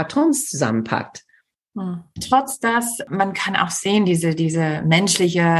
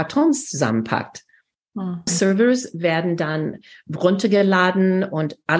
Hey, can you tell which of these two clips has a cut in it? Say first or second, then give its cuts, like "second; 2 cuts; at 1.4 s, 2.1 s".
second; 1 cut; at 2.1 s